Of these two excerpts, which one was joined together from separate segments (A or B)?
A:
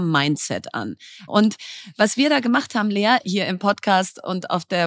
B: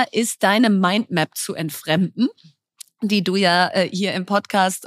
A